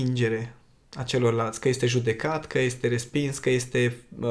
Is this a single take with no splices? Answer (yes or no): yes